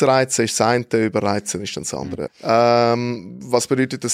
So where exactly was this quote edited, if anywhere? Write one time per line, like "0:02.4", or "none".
0:02.3